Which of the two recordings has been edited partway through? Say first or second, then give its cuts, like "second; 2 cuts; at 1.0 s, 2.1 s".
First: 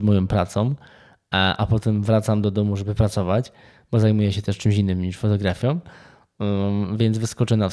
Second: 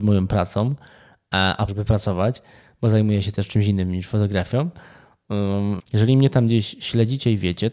second; 2 cuts; at 1.7 s, 5.8 s